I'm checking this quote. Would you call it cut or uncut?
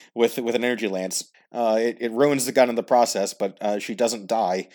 cut